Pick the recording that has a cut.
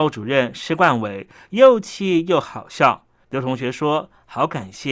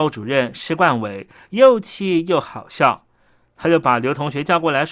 first; 1 cut; at 3.2 s

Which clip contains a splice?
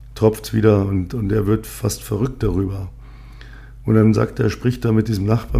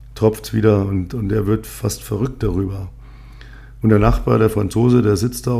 second; 1 cut; at 3.8 s

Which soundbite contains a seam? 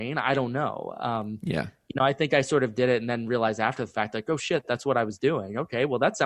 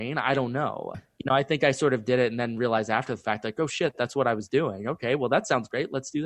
second; 1 cut; at 0.9 s

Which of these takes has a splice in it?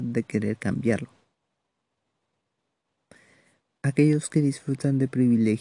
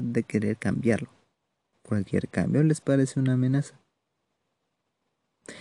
second; 1 cut; at 1.7 s

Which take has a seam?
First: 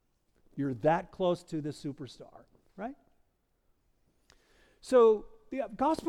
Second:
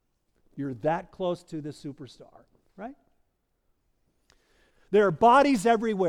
second; 1 cut; at 4.7 s

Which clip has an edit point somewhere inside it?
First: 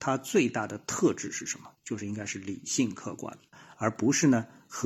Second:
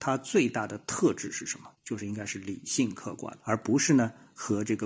second; 1 cut; at 3.4 s

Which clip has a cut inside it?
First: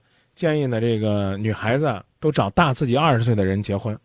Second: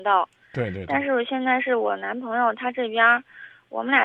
first; 1 cut; at 2.1 s

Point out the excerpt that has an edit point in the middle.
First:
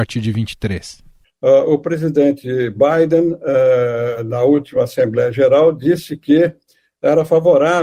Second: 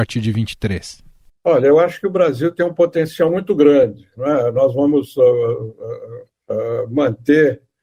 first; 1 cut; at 1.2 s

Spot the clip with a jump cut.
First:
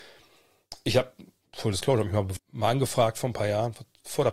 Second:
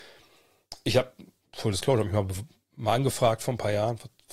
first; 1 cut; at 2.4 s

